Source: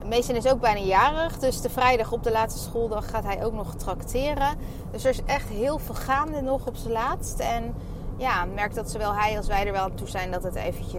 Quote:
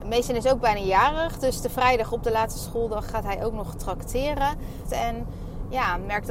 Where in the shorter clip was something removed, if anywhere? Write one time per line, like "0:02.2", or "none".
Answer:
0:04.8